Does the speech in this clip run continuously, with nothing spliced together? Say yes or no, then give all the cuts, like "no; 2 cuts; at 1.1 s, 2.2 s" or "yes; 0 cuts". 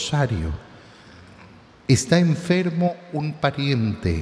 yes; 0 cuts